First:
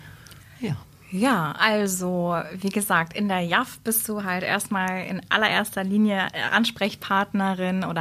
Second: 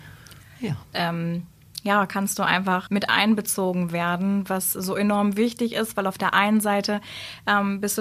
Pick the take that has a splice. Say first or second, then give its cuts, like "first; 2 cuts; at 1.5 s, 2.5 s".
second; 2 cuts; at 0.9 s, 2.9 s